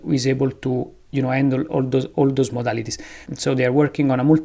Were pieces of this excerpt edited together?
yes; 1 cut; at 3.3 s

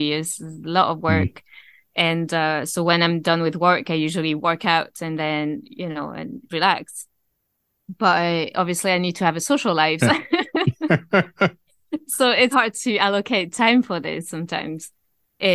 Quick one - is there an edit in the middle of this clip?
yes; 3 cuts; at 8.5 s, 10.0 s, 12.5 s

